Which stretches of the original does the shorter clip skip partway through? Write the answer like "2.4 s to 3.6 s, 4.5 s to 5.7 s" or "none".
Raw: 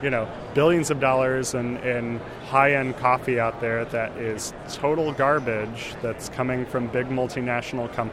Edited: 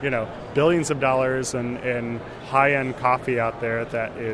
none